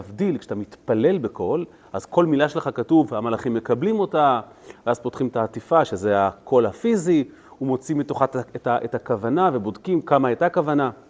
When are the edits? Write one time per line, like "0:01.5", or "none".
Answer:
none